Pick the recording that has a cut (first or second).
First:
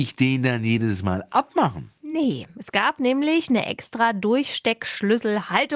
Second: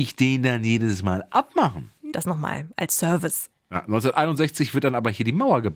second